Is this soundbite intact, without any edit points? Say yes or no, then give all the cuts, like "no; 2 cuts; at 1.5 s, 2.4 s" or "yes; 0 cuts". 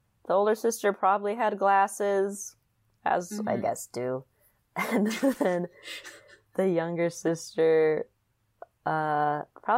no; 1 cut; at 3.4 s